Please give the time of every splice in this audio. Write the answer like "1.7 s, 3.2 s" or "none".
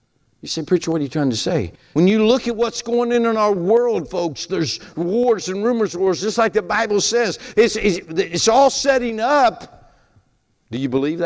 1.9 s, 7.5 s